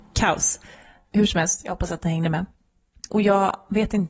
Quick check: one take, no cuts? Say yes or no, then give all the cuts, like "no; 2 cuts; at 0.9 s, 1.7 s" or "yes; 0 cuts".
no; 1 cut; at 3.1 s